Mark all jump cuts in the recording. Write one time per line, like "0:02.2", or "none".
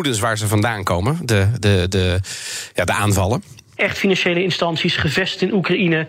0:01.6
0:03.8